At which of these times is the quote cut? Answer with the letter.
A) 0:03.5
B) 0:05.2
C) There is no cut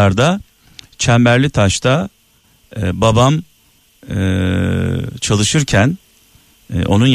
C